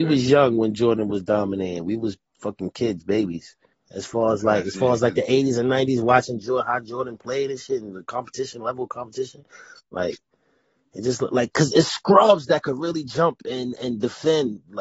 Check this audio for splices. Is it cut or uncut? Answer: cut